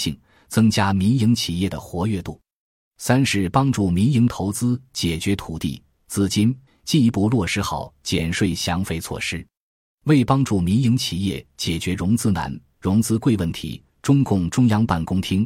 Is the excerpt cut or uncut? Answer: cut